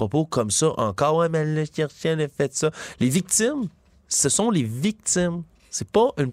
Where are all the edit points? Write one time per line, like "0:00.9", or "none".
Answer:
none